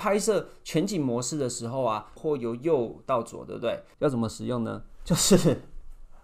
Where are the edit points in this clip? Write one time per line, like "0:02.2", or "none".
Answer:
0:02.2
0:03.9